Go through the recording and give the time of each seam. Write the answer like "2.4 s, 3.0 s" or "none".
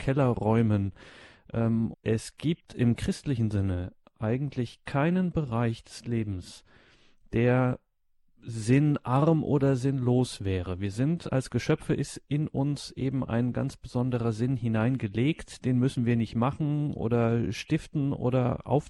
1.9 s